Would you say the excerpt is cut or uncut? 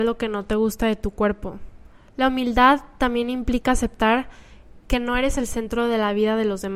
cut